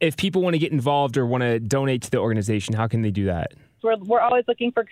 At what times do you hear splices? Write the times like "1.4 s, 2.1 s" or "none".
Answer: 3.8 s